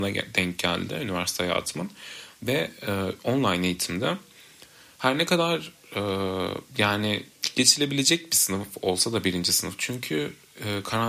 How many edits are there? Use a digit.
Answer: 2